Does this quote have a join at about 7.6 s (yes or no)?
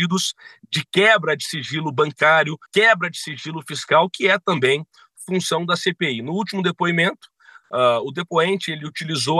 no